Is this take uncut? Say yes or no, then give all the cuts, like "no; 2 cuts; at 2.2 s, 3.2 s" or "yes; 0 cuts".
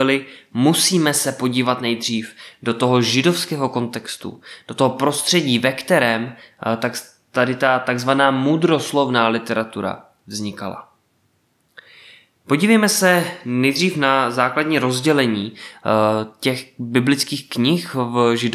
yes; 0 cuts